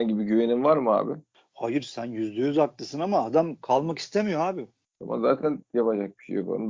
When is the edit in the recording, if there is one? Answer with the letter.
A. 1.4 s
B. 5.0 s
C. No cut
C